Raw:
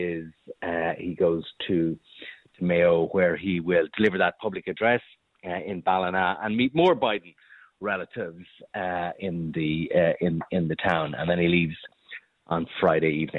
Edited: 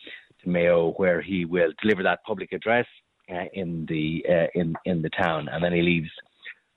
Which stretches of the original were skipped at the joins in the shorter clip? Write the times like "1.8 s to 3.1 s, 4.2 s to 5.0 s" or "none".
5.6 s to 9.1 s